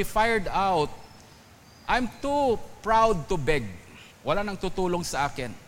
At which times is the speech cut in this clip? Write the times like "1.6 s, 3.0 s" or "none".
4.1 s